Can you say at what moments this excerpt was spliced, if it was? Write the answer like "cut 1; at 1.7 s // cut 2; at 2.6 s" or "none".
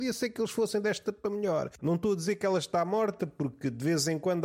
cut 1; at 1.8 s